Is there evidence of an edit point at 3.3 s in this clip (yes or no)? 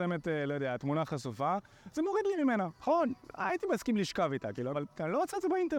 no